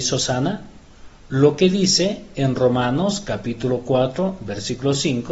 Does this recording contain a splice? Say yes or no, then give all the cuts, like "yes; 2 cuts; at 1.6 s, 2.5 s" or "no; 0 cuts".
no; 0 cuts